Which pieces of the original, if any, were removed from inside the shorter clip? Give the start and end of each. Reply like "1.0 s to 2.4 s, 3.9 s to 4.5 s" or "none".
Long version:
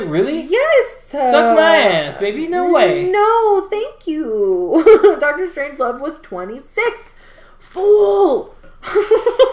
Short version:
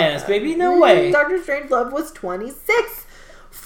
3.0 s to 5.2 s